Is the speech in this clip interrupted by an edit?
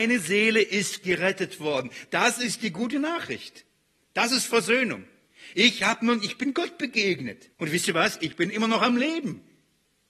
yes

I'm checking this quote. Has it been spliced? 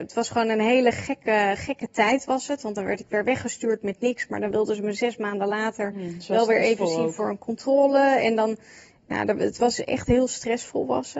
no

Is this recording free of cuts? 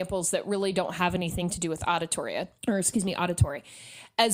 no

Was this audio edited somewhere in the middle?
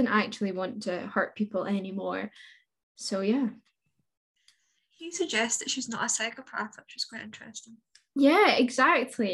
no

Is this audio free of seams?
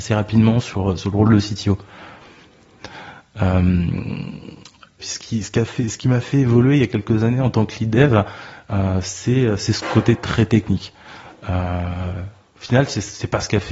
no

